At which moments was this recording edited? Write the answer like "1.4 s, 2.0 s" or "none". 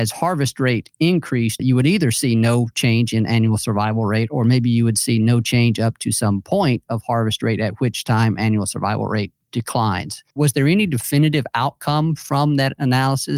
1.6 s, 10.3 s